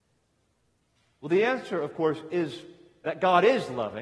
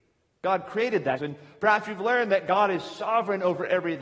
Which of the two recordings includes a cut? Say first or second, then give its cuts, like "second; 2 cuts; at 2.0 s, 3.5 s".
second; 1 cut; at 1.2 s